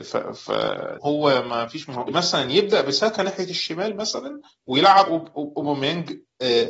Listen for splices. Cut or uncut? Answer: cut